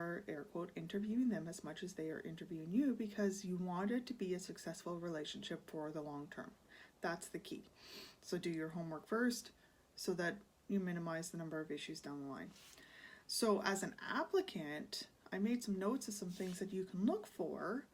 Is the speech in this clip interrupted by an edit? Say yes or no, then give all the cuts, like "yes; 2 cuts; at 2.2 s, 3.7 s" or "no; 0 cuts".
no; 0 cuts